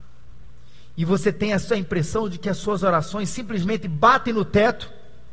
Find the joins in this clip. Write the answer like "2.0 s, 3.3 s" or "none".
none